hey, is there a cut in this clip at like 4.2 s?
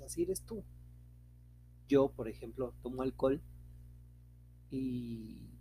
no; 1 cut; at 1.9 s

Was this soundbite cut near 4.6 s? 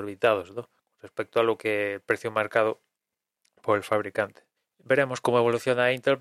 yes; 1 cut; at 4.6 s

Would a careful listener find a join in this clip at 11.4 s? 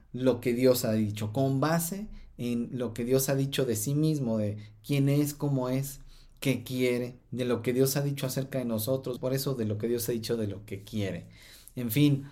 no; 2 cuts; at 7.2 s, 9.2 s

